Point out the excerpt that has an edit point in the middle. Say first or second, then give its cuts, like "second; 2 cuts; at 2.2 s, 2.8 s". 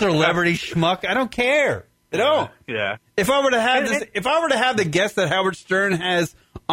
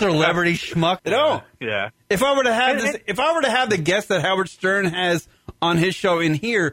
second; 1 cut; at 1.0 s